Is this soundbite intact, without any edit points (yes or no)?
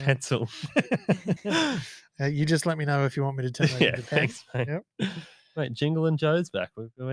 yes